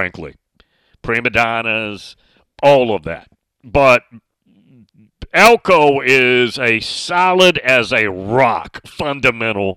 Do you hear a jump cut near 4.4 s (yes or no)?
no